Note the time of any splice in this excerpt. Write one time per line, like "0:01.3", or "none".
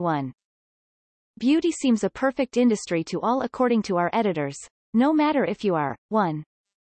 0:06.0

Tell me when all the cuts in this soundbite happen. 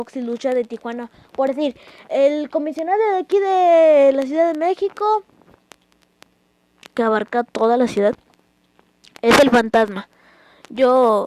none

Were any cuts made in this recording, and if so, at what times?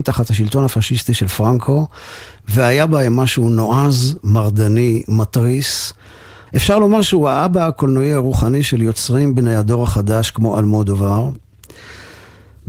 0:06.5

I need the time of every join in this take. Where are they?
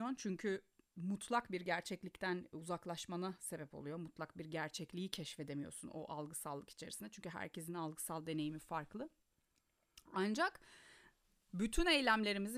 none

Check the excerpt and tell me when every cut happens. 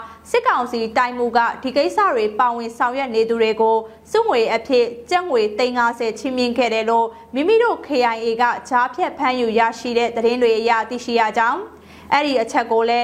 none

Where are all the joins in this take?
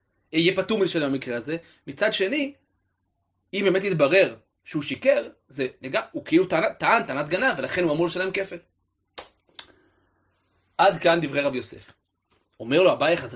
none

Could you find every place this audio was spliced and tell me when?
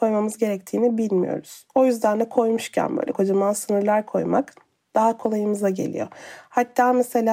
0:03.1

